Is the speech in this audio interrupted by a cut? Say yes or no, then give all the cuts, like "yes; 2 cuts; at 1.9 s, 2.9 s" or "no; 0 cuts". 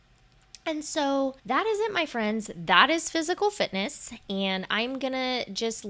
yes; 1 cut; at 1.4 s